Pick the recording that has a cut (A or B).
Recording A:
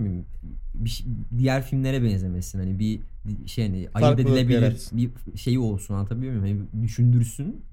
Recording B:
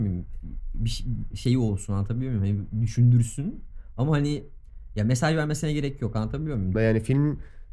B